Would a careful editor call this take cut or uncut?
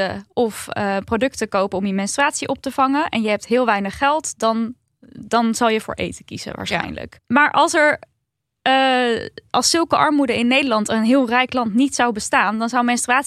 cut